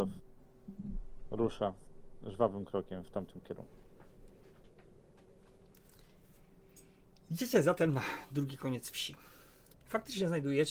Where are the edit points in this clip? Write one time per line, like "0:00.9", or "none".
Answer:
0:09.7

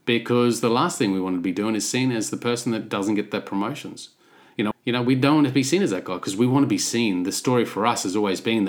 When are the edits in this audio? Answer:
0:04.7

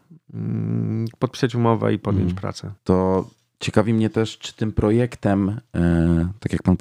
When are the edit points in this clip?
0:02.8

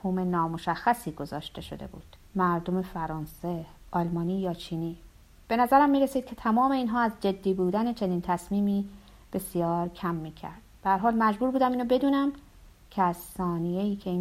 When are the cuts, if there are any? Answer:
0:02.3

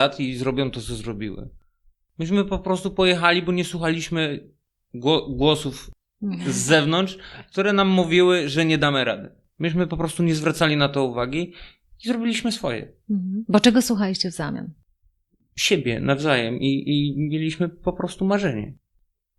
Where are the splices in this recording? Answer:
none

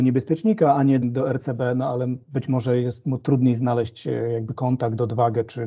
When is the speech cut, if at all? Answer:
0:01.0

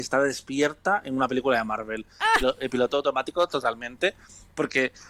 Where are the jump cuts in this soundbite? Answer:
0:02.4

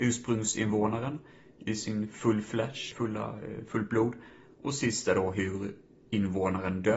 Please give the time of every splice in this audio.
0:02.9

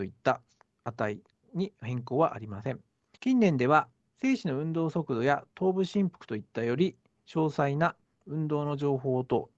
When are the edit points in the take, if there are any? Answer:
0:03.2

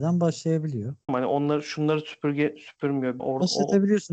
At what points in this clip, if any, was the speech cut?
0:01.1
0:03.2

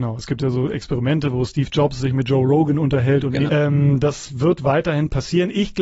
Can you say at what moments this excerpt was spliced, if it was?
0:03.5

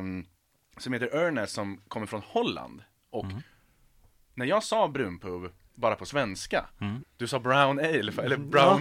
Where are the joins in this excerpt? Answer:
0:07.0

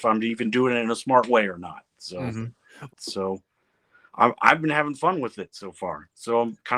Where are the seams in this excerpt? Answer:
0:02.9

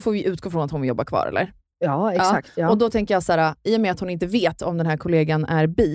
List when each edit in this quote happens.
none

